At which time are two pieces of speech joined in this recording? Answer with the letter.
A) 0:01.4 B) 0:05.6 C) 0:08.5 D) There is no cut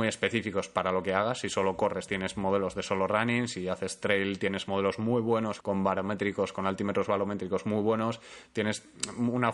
B